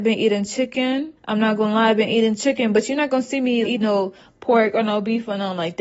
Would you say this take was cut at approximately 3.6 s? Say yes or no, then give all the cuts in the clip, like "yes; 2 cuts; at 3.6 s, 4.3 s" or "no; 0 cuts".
yes; 2 cuts; at 1.2 s, 3.6 s